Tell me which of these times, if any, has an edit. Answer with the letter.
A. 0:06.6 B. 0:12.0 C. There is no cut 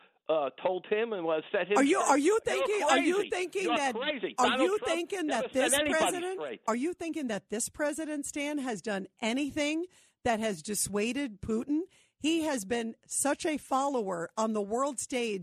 C